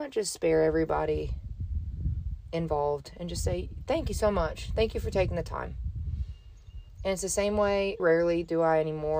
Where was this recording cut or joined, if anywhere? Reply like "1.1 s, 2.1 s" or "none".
8.0 s